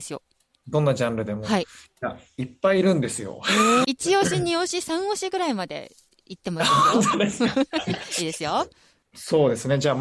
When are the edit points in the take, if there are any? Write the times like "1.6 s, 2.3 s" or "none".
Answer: 3.8 s